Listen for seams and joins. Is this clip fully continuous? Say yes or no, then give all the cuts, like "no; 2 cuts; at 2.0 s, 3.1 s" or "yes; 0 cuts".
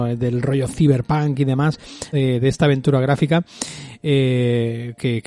no; 1 cut; at 2.1 s